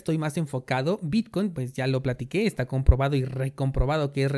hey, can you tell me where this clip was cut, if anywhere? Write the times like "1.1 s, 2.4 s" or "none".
none